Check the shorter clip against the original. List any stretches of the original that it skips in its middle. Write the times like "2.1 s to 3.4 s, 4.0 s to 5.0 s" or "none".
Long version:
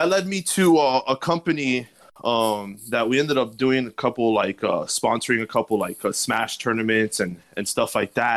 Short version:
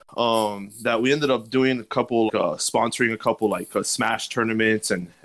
4.3 s to 4.6 s